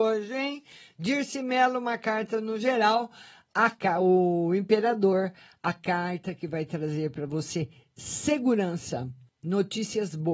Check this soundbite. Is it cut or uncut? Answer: cut